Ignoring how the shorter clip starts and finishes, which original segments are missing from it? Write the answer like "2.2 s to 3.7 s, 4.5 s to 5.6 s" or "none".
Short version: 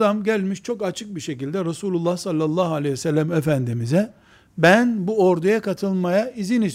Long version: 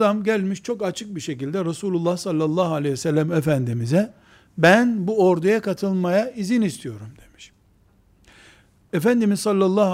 none